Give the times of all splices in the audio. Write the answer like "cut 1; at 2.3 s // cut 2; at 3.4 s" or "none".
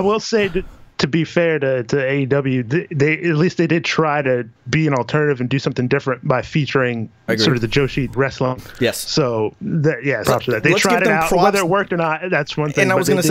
cut 1; at 8.1 s // cut 2; at 10.2 s

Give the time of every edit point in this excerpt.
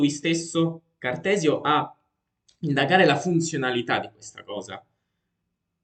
none

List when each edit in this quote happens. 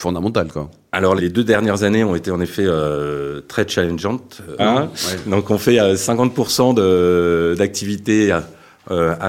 cut 1; at 1.2 s // cut 2; at 4.6 s

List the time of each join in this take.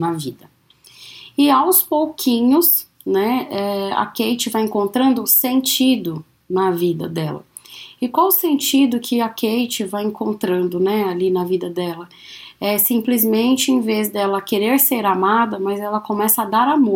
none

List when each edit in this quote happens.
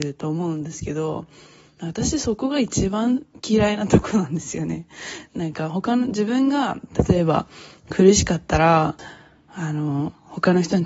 cut 1; at 5.3 s

